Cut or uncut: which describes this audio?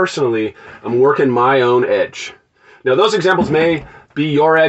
uncut